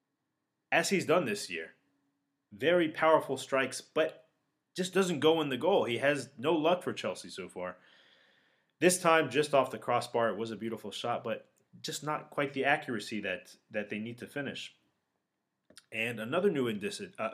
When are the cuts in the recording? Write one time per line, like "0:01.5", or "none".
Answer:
none